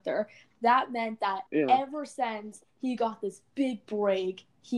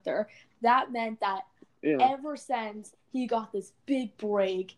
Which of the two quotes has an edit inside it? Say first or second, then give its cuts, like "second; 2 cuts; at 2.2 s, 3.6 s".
first; 1 cut; at 1.5 s